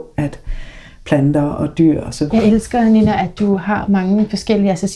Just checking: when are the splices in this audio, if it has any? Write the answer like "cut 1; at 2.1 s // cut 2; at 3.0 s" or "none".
cut 1; at 2.3 s